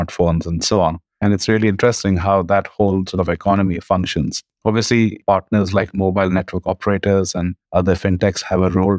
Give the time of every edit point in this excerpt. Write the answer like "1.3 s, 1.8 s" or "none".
none